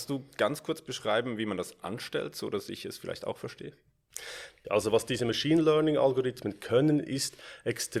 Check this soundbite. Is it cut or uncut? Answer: cut